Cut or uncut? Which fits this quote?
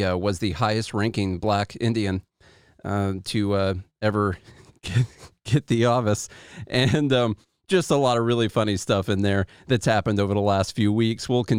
uncut